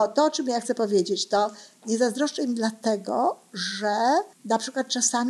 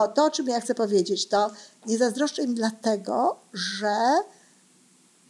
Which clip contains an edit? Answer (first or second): first